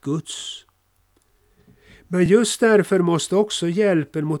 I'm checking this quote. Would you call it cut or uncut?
uncut